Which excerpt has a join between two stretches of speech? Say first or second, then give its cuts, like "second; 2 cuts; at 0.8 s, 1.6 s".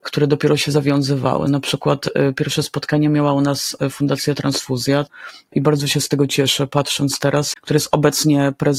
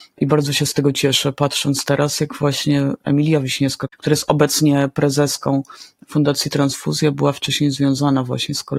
first; 1 cut; at 7.5 s